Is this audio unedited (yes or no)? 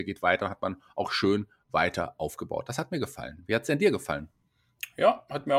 yes